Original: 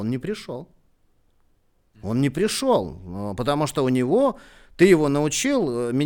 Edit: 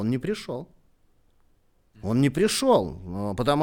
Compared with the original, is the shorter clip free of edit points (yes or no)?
yes